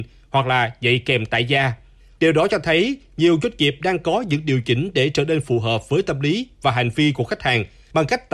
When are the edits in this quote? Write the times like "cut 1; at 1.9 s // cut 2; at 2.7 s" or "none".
none